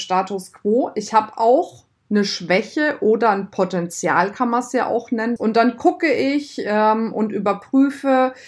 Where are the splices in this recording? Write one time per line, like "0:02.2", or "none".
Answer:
0:05.4

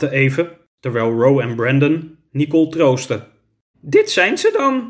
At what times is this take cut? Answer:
0:03.7

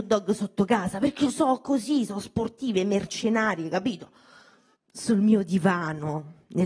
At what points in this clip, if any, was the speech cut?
0:04.7

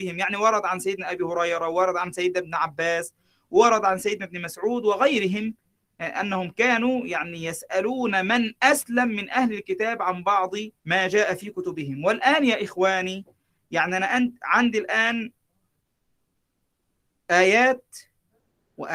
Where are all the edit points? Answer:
0:10.8

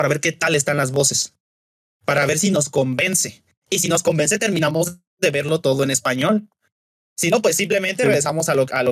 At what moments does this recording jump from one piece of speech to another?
none

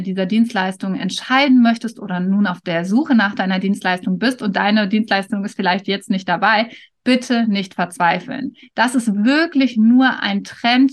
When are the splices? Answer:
none

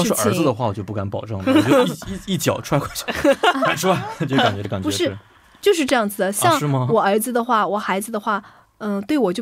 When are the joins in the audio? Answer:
none

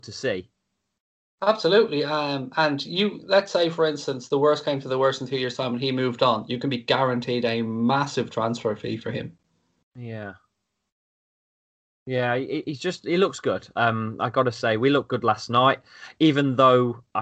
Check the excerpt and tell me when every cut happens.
none

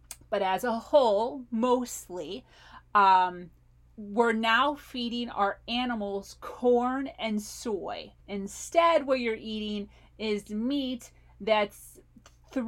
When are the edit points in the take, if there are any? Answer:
0:08.2

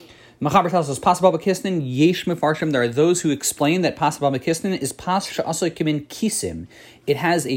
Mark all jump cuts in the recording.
none

